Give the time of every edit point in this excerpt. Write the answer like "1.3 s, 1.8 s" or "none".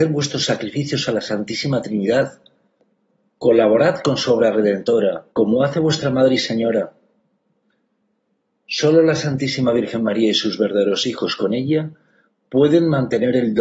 5.3 s